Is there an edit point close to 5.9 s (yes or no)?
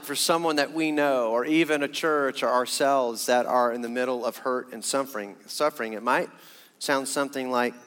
no